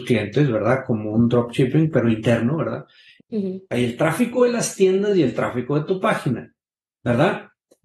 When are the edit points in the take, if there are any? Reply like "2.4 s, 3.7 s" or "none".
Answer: 3.2 s